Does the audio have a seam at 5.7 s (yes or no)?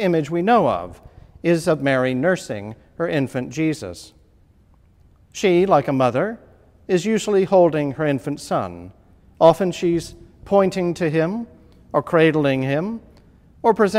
no